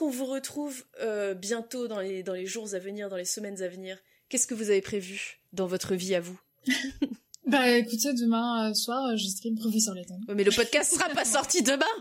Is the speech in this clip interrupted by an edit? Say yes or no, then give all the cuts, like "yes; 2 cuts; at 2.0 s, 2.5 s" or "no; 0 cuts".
no; 0 cuts